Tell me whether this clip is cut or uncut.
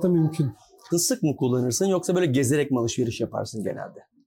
cut